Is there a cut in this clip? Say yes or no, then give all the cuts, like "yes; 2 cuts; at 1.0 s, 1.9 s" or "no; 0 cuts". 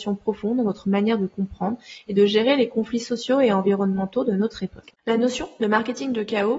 yes; 1 cut; at 5.0 s